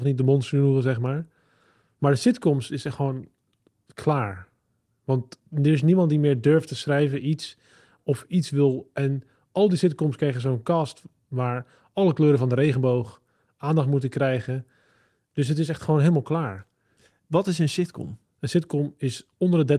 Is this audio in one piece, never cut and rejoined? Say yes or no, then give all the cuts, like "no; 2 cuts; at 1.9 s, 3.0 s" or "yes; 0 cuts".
yes; 0 cuts